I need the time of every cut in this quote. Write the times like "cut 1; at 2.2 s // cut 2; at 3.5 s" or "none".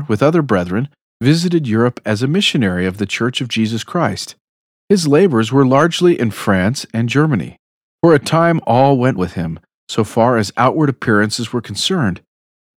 cut 1; at 7.9 s // cut 2; at 9.2 s